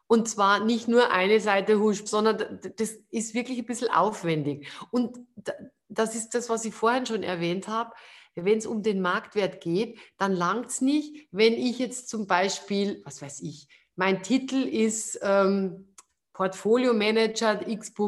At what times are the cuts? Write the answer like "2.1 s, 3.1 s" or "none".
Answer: 2.1 s